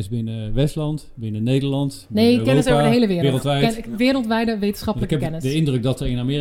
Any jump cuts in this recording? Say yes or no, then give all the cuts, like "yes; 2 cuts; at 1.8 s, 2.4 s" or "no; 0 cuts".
no; 0 cuts